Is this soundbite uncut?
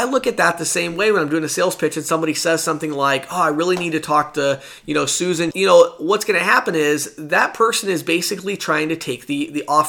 no; 1 cut; at 5.5 s

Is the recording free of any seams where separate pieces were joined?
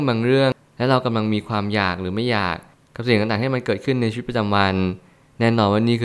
yes; 0 cuts

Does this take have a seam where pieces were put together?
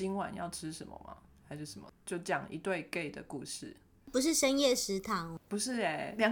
no; 0 cuts

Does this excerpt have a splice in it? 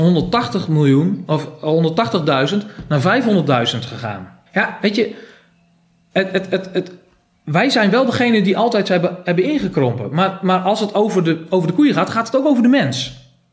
yes; 1 cut; at 4.5 s

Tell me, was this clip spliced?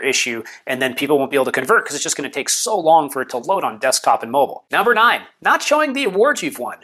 no; 0 cuts

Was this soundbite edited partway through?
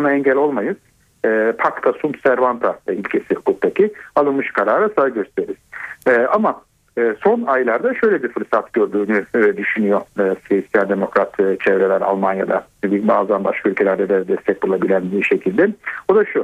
no; 0 cuts

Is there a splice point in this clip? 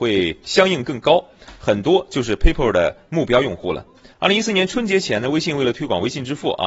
yes; 1 cut; at 4.1 s

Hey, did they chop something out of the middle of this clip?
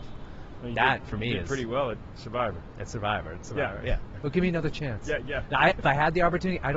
yes; 1 cut; at 5.7 s

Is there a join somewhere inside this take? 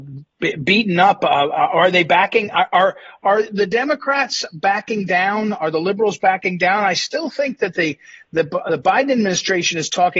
no; 0 cuts

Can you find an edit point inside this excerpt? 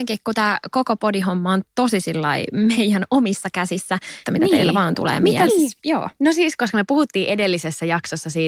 yes; 2 cuts; at 4.2 s, 5.5 s

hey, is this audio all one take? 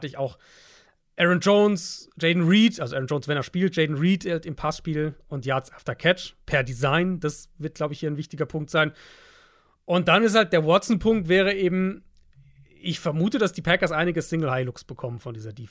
yes; 0 cuts

